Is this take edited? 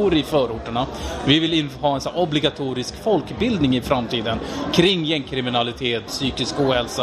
yes; 1 cut; at 6.1 s

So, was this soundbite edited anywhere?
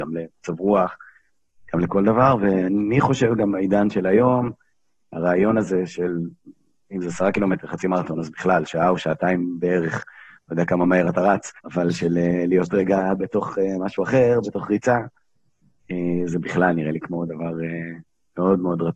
yes; 1 cut; at 11.6 s

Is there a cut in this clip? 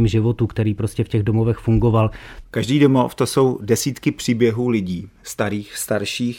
yes; 1 cut; at 2.4 s

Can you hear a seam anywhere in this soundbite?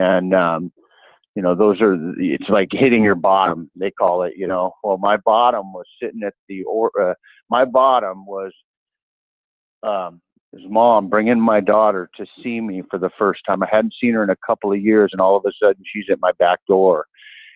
yes; 1 cut; at 10.3 s

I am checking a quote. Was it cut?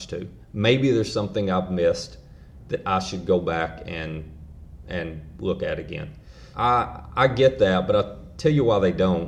yes; 1 cut; at 6.5 s

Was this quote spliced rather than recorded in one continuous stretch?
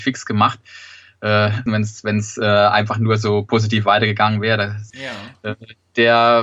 yes; 2 cuts; at 1.7 s, 4.9 s

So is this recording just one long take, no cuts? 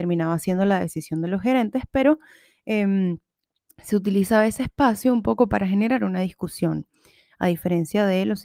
yes; 0 cuts

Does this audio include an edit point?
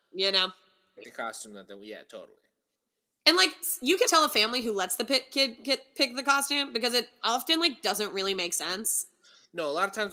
yes; 2 cuts; at 1.0 s, 4.1 s

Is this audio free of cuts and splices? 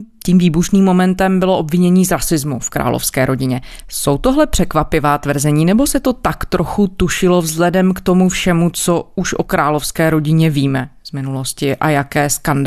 yes; 0 cuts

